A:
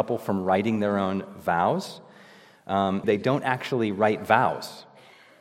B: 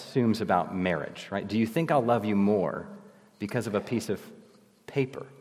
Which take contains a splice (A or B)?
A